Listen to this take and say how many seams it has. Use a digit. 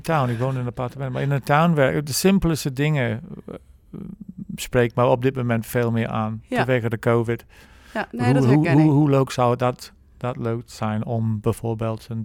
1